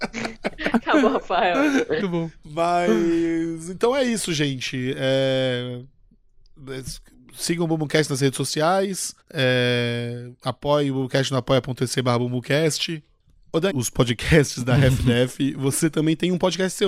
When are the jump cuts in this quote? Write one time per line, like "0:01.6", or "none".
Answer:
0:02.0
0:09.2
0:13.7